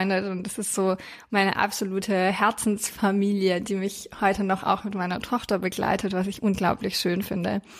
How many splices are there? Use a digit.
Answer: 0